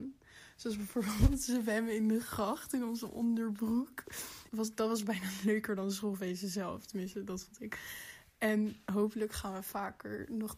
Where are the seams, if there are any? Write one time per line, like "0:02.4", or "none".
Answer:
0:04.5